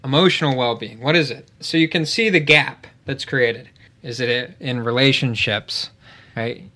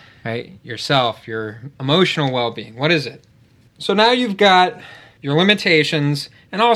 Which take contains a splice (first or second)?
first